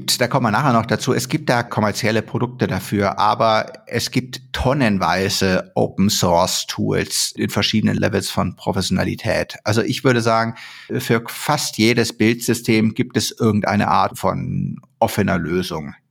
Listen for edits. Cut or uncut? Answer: uncut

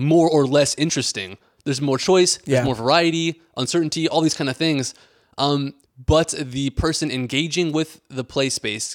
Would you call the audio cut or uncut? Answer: cut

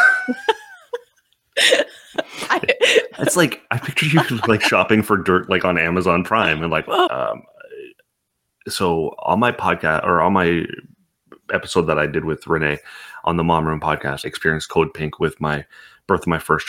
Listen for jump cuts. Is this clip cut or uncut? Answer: cut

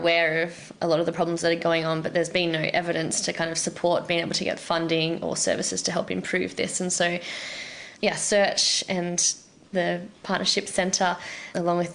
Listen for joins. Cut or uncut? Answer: uncut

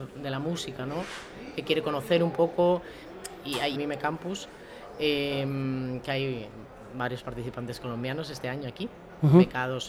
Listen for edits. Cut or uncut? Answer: cut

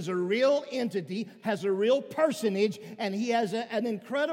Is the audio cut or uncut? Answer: uncut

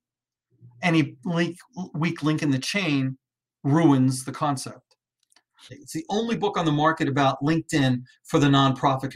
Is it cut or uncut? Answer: cut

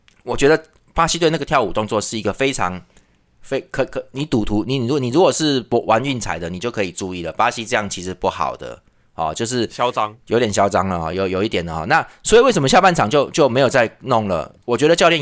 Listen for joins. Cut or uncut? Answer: uncut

